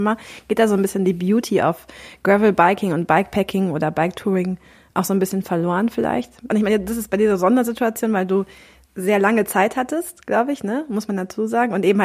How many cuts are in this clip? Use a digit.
1